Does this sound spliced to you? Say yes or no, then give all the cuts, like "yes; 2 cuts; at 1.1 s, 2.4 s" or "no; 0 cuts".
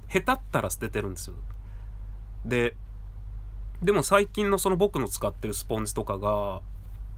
no; 0 cuts